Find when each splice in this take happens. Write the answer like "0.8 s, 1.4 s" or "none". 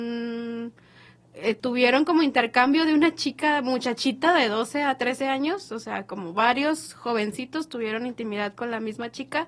1.6 s